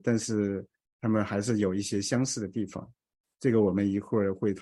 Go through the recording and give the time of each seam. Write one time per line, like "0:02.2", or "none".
none